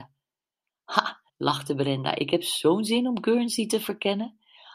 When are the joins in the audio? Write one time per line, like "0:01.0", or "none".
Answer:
0:01.3